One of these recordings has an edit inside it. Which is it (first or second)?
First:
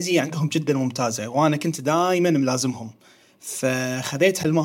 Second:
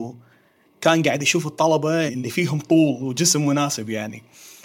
second